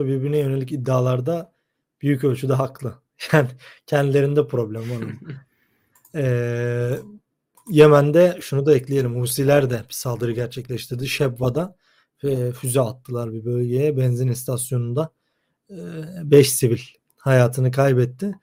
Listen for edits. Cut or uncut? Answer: uncut